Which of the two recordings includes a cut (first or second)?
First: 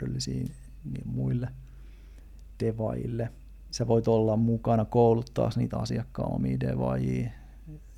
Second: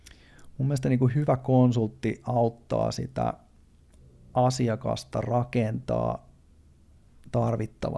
first